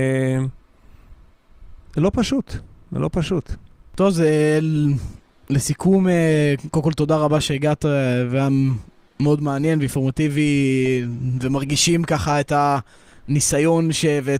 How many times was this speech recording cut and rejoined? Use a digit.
0